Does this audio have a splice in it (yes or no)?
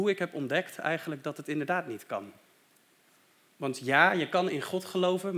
yes